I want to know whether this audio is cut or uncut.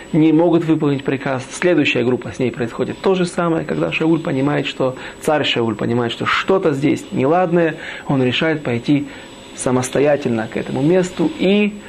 uncut